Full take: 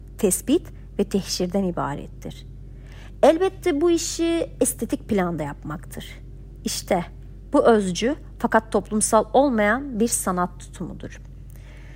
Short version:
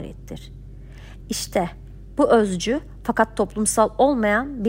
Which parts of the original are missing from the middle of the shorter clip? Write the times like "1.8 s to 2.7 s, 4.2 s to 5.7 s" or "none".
3.2 s to 6.6 s